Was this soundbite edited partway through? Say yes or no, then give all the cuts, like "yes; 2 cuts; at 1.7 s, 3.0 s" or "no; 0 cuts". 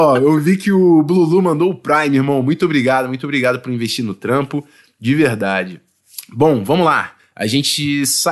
no; 0 cuts